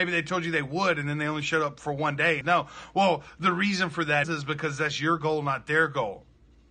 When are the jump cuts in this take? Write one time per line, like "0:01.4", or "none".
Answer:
0:02.4
0:04.2